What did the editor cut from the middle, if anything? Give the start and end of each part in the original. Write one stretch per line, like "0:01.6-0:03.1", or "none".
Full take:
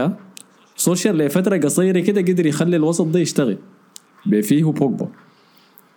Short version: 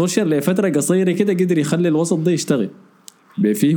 none